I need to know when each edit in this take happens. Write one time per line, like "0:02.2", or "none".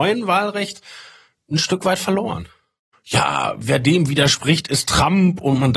0:02.9

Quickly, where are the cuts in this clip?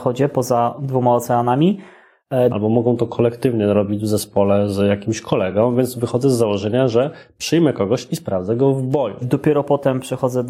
0:02.5
0:09.2

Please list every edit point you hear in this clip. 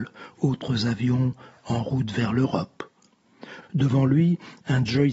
0:03.6

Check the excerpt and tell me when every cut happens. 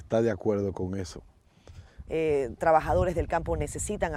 0:02.1

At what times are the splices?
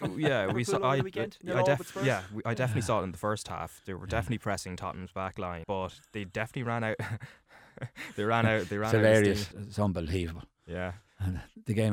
0:05.6
0:09.5

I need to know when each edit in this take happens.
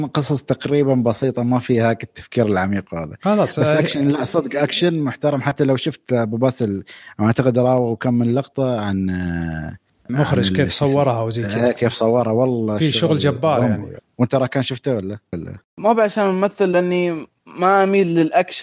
0:15.3

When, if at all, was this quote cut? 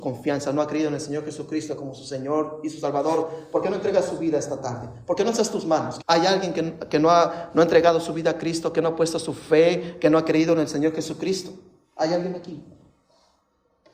0:06.0

